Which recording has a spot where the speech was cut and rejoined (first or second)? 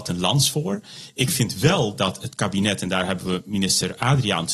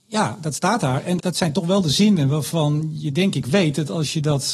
second